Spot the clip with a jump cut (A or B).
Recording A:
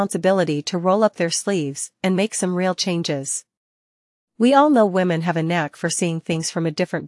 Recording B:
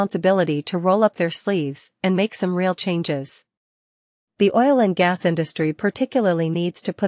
A